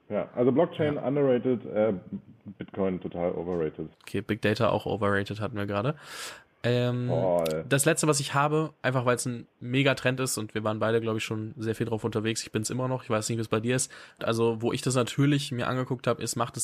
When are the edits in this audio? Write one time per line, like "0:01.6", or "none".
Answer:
0:03.9
0:14.2